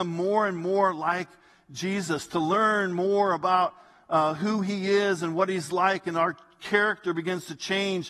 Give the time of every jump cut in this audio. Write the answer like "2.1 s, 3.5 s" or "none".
none